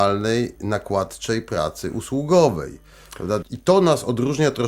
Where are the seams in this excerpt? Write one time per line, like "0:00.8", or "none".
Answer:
0:03.4